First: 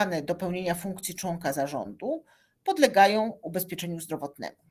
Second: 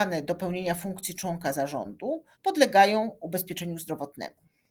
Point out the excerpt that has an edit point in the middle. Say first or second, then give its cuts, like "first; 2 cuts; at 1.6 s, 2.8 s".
second; 1 cut; at 2.3 s